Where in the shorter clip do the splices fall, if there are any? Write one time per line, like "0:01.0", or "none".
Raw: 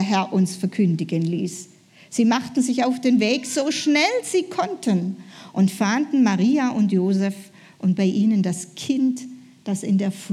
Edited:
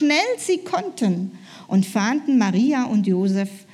none